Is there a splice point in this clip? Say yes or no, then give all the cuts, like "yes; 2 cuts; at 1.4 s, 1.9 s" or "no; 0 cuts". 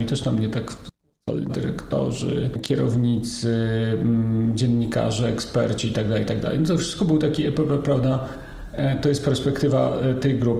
yes; 1 cut; at 1.5 s